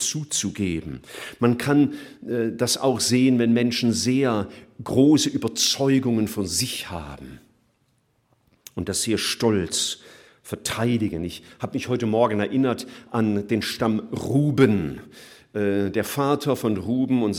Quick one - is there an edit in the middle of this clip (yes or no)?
no